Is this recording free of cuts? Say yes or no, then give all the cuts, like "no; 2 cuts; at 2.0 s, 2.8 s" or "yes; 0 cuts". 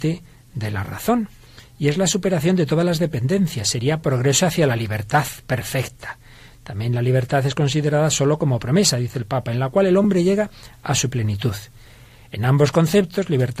yes; 0 cuts